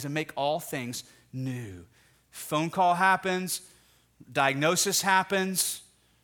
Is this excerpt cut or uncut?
cut